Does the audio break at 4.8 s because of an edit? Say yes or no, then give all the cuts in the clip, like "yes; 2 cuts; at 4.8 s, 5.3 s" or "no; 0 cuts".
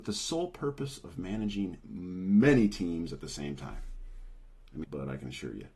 yes; 1 cut; at 4.8 s